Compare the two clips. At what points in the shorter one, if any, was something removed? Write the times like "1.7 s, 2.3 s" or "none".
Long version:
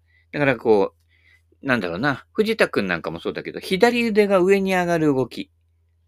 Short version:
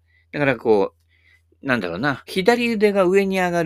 2.3 s